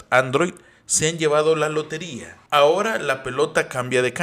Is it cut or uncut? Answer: cut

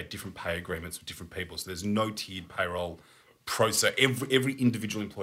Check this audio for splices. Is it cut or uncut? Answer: uncut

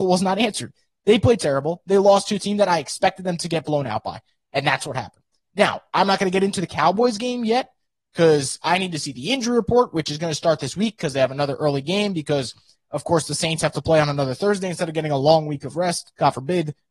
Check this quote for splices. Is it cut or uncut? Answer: uncut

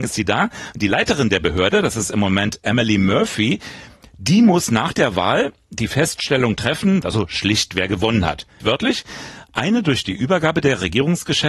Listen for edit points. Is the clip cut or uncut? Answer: cut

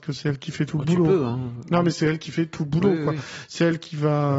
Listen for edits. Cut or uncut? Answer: uncut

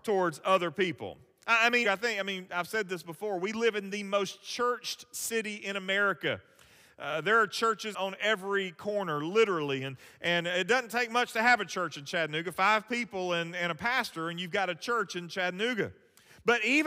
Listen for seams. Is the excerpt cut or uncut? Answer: cut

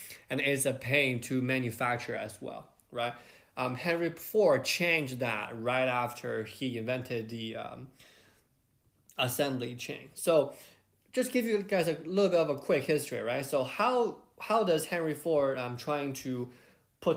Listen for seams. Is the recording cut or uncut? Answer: uncut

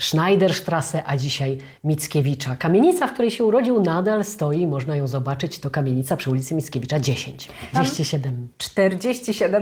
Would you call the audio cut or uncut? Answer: cut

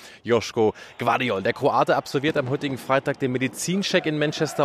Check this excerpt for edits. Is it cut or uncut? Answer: uncut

